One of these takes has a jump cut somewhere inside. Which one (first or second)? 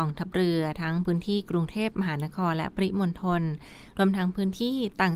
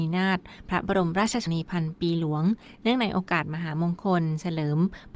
second